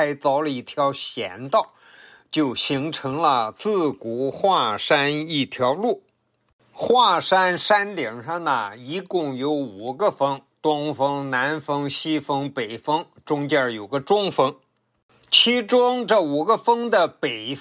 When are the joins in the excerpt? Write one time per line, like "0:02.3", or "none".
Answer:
none